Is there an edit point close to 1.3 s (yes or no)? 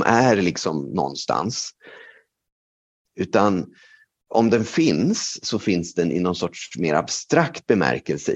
no